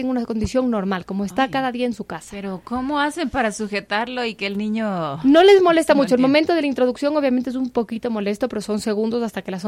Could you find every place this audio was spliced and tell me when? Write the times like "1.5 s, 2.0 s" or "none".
none